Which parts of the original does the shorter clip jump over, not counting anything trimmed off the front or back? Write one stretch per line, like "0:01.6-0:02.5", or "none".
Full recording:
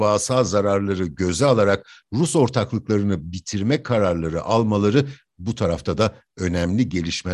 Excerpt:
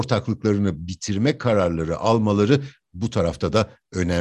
none